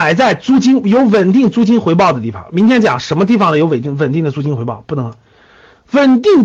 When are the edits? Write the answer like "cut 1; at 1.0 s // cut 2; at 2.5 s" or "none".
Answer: none